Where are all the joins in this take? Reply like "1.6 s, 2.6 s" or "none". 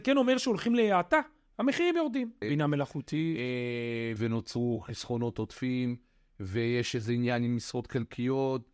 2.4 s, 4.2 s